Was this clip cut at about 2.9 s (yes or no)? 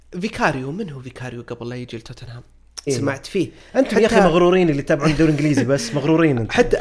yes